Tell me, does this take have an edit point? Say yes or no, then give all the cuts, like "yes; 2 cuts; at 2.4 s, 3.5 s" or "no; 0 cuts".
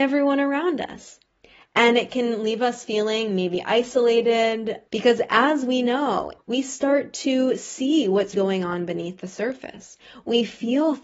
yes; 3 cuts; at 4.9 s, 6.4 s, 8.3 s